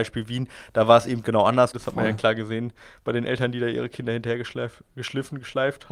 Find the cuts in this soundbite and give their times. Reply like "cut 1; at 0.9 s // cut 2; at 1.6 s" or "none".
cut 1; at 1.7 s